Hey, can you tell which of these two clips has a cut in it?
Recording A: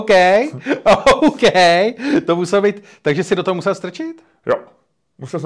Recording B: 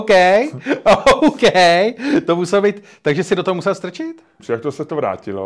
B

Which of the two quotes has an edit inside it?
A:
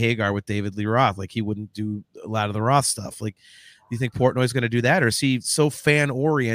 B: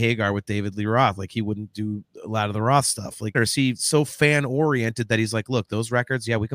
B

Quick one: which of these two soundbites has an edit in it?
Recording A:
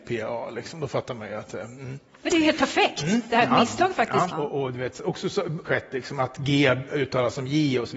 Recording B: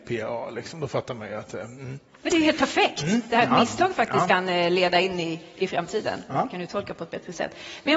A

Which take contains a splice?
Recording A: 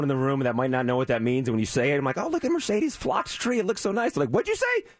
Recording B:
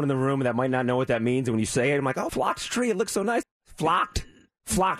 B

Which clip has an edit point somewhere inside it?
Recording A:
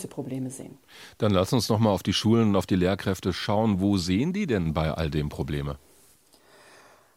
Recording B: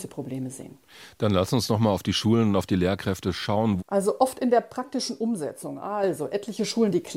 B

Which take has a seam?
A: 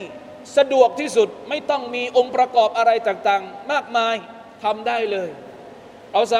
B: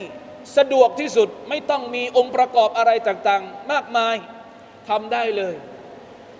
A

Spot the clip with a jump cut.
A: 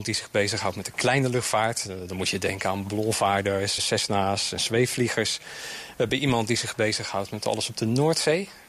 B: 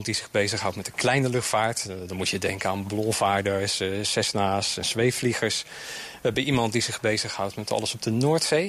A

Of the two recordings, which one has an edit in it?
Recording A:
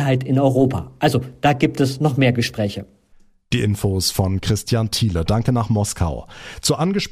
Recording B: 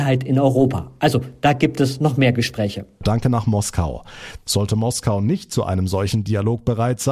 B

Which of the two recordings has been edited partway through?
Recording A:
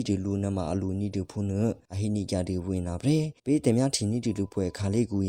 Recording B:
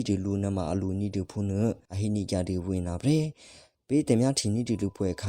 A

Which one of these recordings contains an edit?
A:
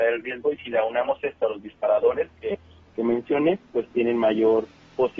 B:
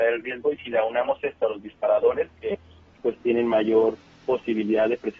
B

